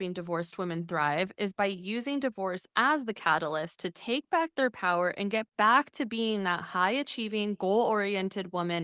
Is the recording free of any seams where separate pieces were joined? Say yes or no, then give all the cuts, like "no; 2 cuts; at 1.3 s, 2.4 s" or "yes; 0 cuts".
yes; 0 cuts